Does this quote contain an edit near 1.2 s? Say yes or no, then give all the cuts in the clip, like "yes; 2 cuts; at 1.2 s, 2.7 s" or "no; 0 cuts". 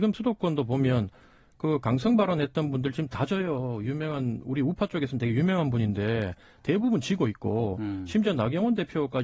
no; 0 cuts